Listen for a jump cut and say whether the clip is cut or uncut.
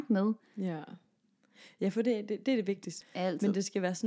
cut